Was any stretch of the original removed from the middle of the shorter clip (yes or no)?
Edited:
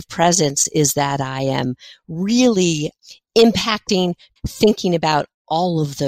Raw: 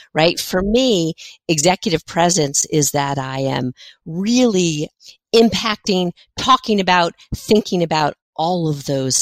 yes